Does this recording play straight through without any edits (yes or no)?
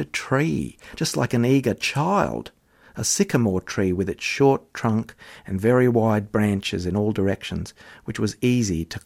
yes